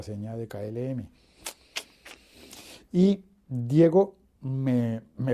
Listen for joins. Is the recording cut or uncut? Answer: uncut